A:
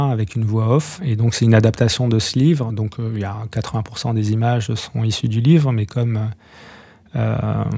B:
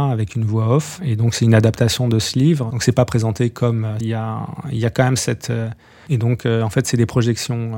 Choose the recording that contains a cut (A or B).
B